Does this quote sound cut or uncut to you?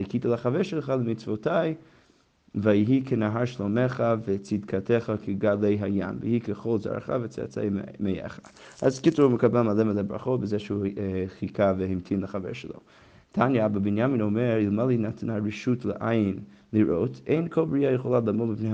uncut